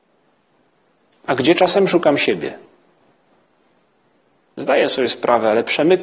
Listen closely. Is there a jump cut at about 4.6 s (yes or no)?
yes